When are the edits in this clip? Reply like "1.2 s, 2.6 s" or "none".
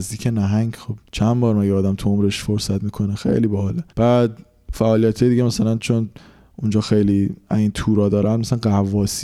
1.1 s, 3.9 s